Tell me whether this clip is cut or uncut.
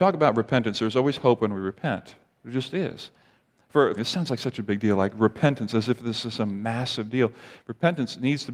cut